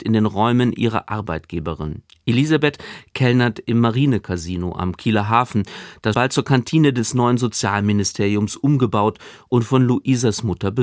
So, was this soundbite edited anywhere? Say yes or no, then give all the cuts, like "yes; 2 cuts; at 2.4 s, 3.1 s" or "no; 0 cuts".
yes; 1 cut; at 6.1 s